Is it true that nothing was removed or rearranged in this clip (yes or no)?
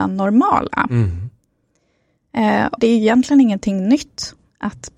no